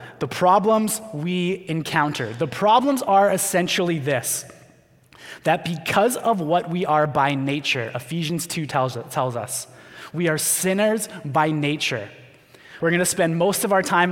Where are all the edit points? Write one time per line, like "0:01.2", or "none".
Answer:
0:12.8